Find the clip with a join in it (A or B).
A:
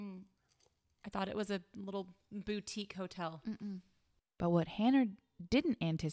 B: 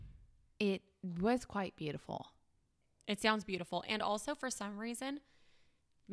A